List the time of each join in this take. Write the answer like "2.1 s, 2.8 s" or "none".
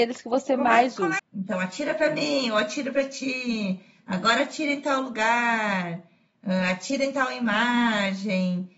1.2 s